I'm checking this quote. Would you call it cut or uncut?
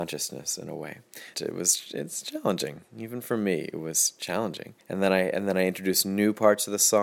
cut